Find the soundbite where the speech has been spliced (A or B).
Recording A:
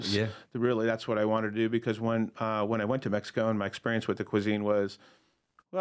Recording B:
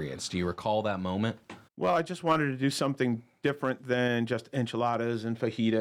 B